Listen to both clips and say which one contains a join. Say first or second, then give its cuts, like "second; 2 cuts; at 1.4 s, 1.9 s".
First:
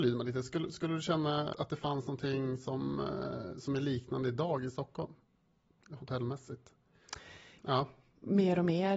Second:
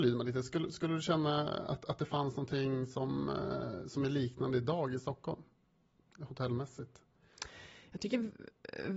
first; 2 cuts; at 1.5 s, 7.6 s